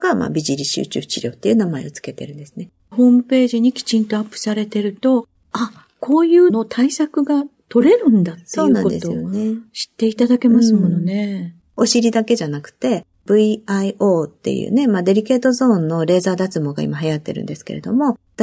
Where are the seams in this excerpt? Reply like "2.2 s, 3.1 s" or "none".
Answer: 6.5 s, 11.6 s